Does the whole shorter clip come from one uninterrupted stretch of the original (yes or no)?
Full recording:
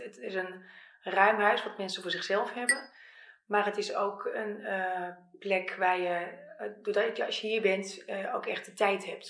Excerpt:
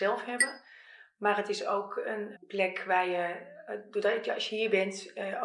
no